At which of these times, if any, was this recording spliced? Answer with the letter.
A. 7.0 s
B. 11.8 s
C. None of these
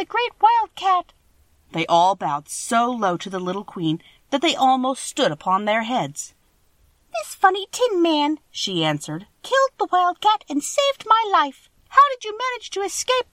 B